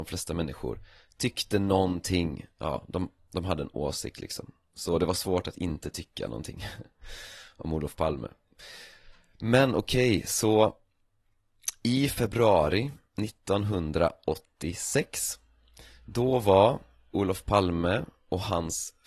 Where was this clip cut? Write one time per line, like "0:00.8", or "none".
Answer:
0:03.2

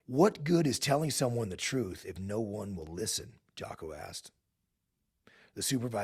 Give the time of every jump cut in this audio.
none

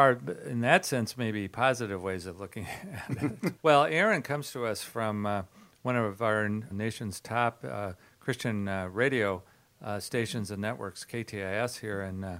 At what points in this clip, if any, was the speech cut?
0:03.6
0:06.7

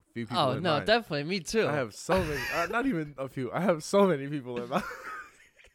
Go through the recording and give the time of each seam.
none

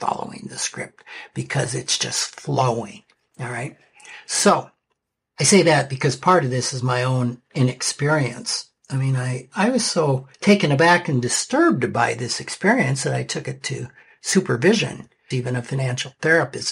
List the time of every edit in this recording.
0:10.3
0:15.3

